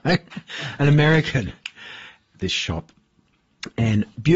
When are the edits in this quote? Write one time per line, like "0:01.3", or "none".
0:02.3